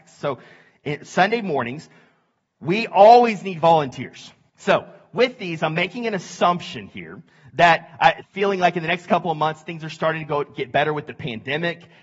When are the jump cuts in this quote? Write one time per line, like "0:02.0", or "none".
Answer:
0:04.5
0:08.2